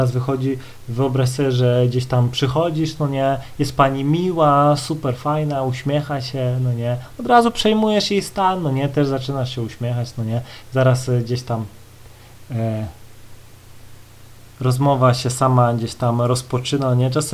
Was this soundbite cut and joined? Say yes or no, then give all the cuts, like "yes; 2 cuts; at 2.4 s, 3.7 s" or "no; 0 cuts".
no; 0 cuts